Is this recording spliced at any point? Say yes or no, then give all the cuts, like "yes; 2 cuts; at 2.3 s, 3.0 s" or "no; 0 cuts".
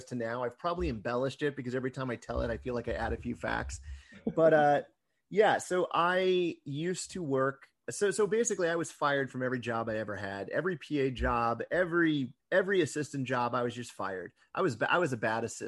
yes; 1 cut; at 12.4 s